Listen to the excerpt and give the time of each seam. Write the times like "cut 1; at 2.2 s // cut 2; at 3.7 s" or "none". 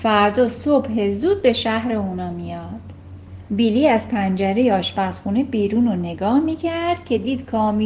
cut 1; at 3.5 s